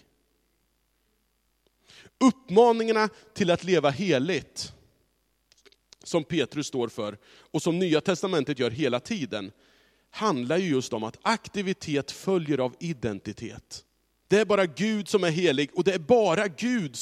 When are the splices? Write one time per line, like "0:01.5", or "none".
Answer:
0:14.2